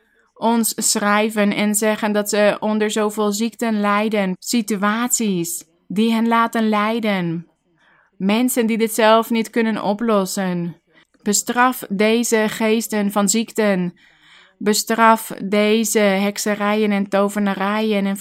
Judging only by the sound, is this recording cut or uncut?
cut